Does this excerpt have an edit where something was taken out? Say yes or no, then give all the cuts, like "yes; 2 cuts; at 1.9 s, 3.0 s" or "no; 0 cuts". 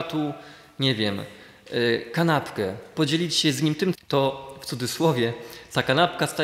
yes; 1 cut; at 3.9 s